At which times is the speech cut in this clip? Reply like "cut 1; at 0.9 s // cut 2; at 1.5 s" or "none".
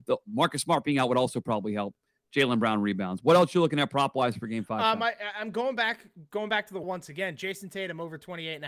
cut 1; at 6.8 s